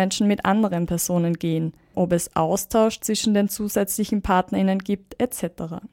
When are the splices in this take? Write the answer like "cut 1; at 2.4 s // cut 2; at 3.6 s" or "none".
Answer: cut 1; at 1.9 s